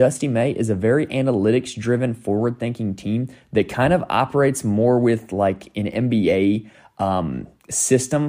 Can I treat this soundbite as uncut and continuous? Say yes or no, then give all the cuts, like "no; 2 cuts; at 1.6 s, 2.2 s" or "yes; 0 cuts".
yes; 0 cuts